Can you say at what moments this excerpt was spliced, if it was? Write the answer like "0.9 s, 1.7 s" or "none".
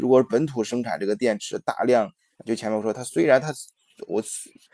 2.3 s